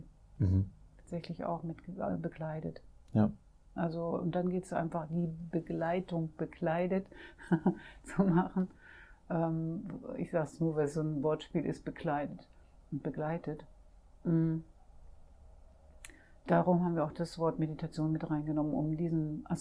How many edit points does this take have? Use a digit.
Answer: 0